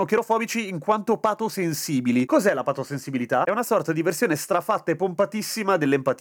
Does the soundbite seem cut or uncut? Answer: uncut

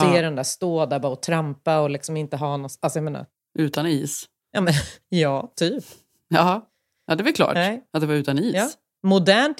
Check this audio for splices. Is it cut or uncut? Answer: uncut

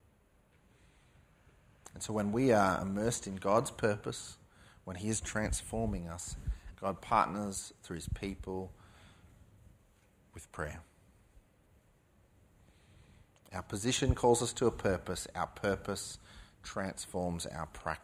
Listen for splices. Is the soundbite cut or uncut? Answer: cut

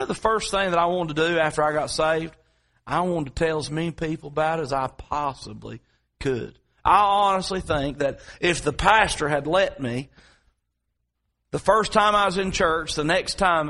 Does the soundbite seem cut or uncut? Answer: uncut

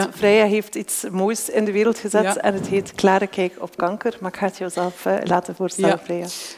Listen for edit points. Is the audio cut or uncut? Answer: uncut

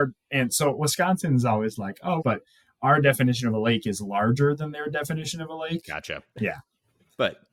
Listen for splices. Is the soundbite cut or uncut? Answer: cut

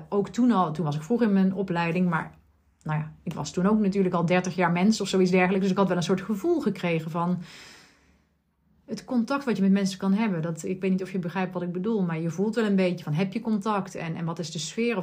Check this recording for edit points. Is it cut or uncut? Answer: uncut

